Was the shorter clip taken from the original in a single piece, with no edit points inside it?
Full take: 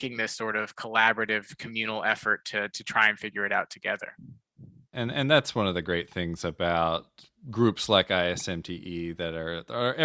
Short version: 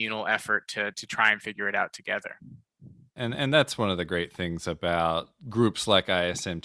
no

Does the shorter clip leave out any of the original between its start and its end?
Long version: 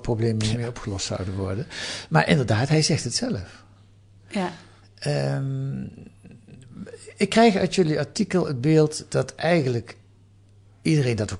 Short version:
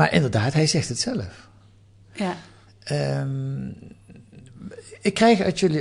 no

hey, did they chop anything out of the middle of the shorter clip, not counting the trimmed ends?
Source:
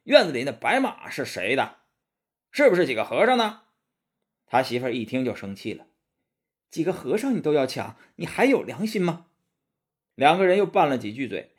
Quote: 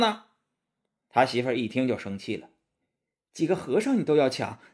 no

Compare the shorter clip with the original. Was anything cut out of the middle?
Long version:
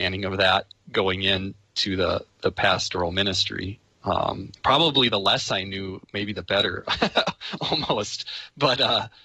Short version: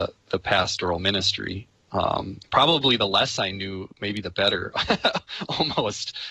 no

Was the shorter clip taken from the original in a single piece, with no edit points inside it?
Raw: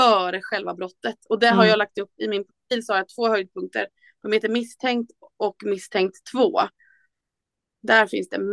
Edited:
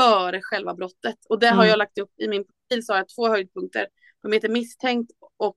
yes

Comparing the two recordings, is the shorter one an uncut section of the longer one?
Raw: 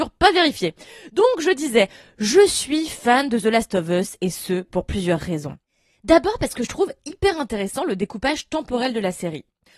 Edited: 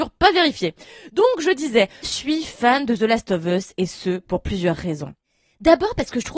no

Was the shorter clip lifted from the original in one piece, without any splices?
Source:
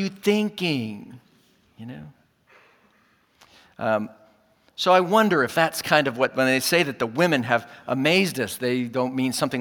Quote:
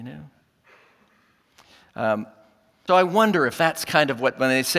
no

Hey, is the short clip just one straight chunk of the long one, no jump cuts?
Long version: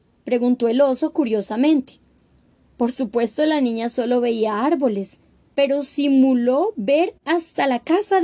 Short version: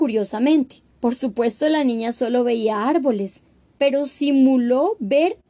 no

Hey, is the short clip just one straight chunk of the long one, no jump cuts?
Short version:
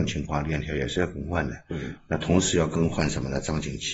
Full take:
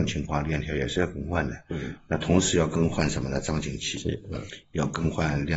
yes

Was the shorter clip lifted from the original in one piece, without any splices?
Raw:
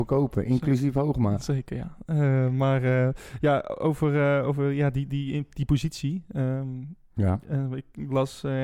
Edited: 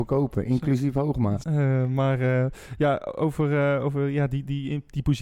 no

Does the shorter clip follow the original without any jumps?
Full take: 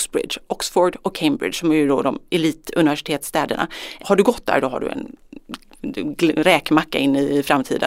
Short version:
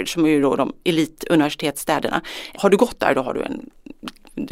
yes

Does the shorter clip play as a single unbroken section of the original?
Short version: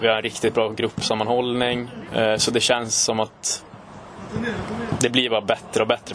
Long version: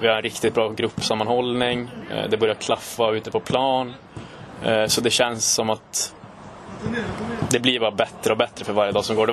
no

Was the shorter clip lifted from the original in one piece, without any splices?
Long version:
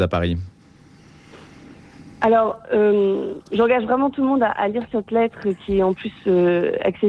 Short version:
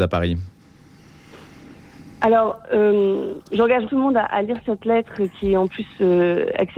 no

